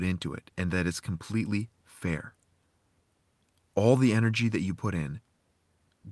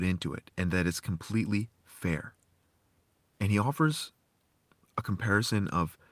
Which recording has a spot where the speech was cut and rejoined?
second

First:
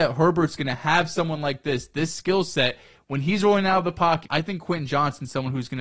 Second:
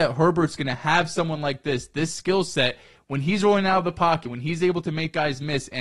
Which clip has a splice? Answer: first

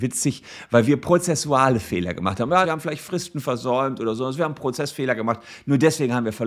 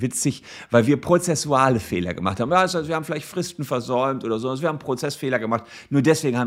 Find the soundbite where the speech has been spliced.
first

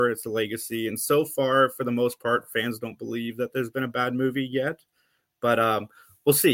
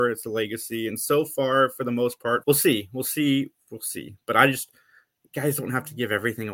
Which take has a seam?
second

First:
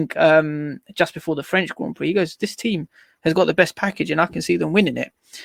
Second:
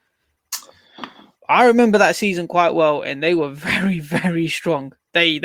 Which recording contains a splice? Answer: second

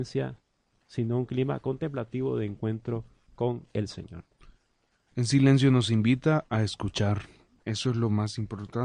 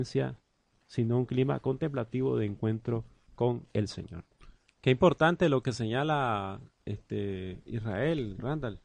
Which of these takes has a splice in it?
second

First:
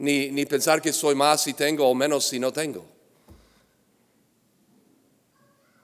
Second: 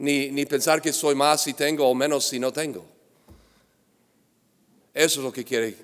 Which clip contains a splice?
second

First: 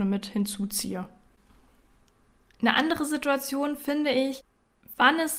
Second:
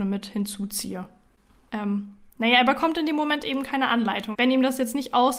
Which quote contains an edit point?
second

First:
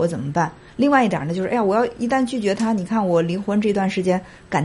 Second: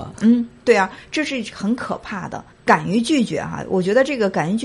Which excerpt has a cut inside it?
second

